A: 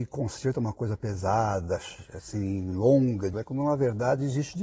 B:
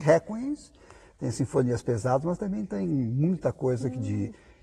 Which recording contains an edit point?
A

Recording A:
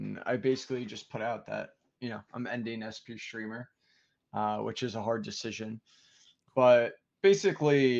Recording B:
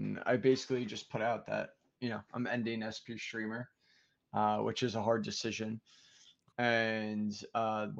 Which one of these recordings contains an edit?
B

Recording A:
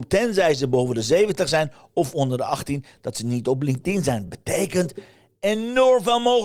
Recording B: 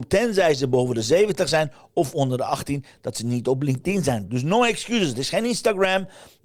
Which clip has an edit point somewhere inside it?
B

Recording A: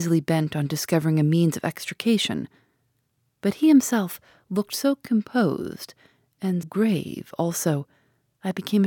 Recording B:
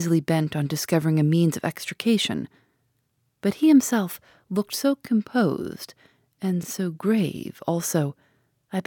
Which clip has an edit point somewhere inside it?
A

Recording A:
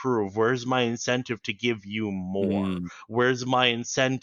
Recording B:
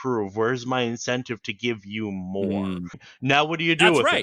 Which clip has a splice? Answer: B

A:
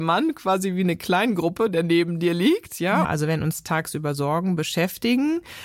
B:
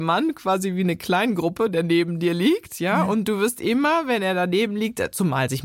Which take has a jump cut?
A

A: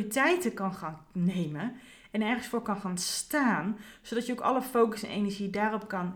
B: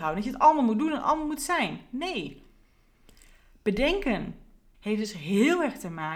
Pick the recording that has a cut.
B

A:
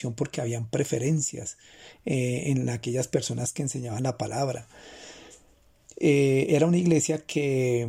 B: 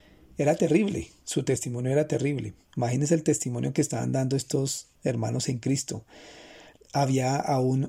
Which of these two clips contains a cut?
B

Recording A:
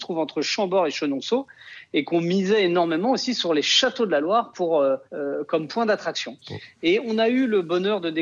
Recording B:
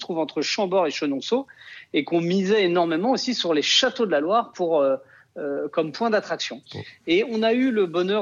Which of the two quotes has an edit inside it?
A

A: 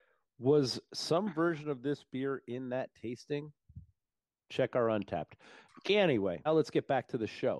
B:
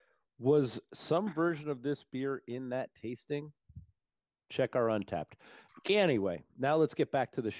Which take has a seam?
A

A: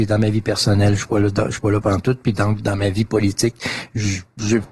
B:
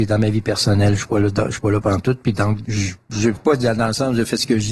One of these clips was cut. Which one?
B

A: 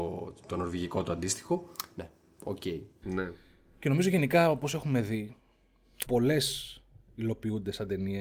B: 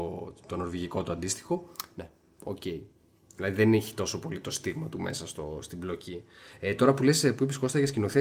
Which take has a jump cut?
A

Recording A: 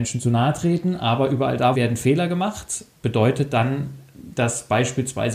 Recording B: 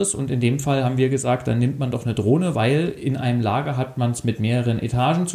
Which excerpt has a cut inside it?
A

